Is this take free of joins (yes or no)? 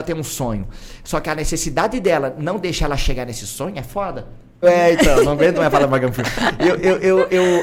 no